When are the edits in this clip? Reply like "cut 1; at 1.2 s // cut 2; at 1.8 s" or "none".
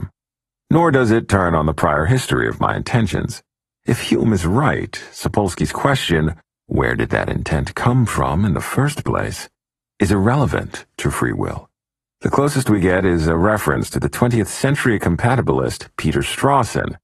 cut 1; at 12.0 s

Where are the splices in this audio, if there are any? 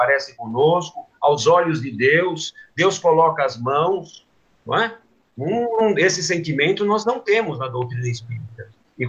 none

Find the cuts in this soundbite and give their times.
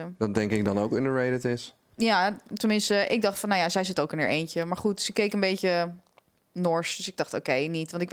none

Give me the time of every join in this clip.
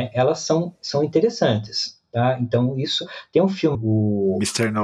cut 1; at 3.7 s

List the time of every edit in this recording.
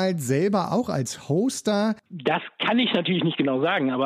cut 1; at 2.0 s

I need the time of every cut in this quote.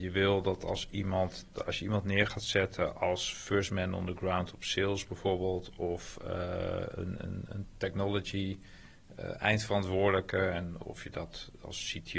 none

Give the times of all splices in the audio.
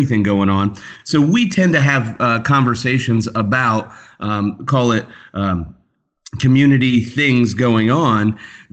none

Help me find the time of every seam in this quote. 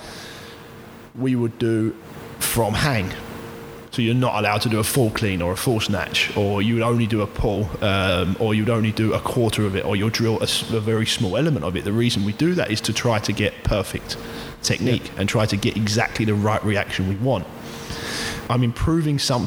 cut 1; at 18.5 s

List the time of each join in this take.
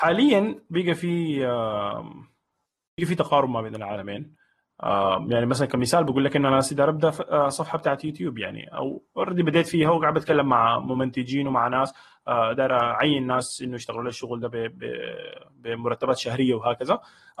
cut 1; at 12.5 s

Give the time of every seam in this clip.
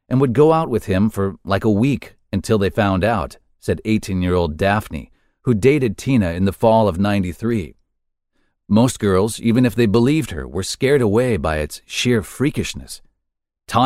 cut 1; at 8.6 s

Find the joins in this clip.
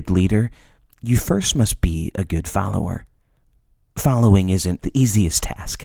cut 1; at 4.8 s

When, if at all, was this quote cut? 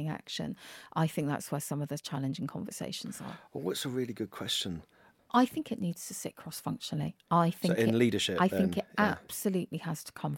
cut 1; at 5.2 s

